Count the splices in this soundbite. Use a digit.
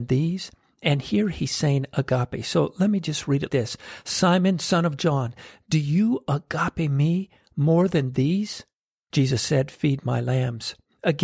2